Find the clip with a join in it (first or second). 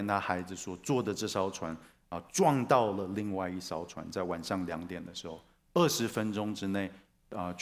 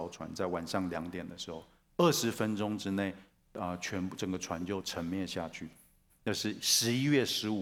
second